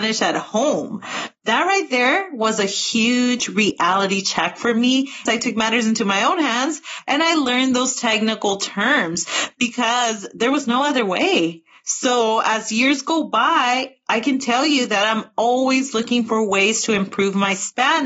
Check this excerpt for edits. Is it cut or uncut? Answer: cut